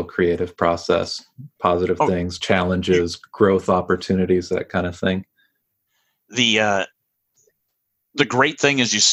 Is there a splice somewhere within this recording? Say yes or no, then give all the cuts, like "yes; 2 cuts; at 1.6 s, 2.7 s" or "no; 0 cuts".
no; 0 cuts